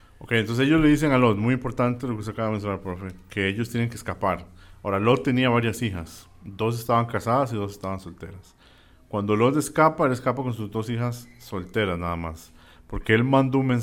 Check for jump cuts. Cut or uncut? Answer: uncut